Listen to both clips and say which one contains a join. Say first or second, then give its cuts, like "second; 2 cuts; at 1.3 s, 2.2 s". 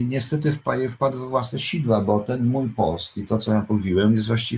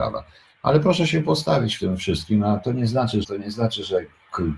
second; 1 cut; at 3.2 s